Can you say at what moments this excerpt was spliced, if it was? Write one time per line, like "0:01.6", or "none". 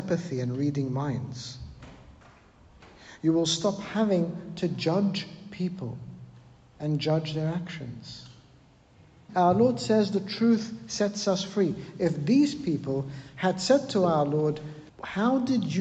0:09.3
0:14.9